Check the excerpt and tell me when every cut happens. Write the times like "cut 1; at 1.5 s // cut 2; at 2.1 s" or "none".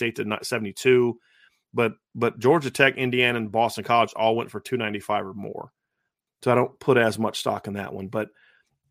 cut 1; at 6.3 s

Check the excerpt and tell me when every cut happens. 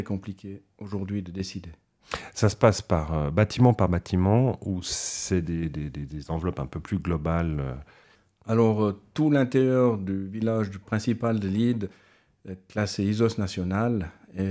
none

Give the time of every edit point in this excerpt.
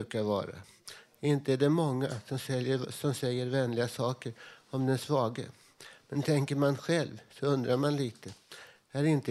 none

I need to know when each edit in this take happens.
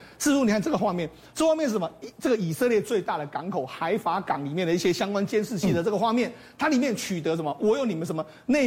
cut 1; at 7.6 s

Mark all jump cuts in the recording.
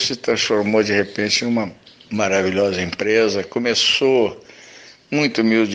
none

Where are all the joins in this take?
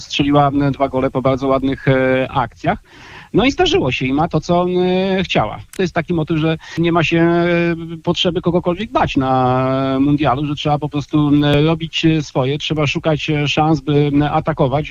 cut 1; at 5.8 s

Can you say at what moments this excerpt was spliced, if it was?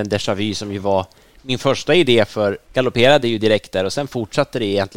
cut 1; at 2.6 s

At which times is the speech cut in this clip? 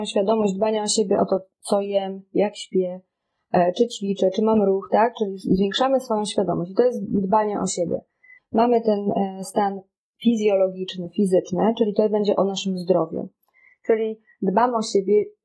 cut 1; at 8.4 s

